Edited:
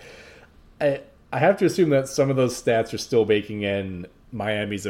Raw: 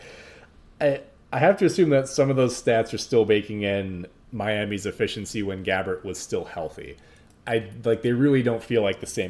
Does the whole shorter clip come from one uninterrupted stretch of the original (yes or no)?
yes